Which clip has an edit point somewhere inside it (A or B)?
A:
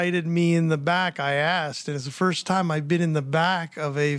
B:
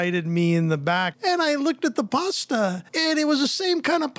B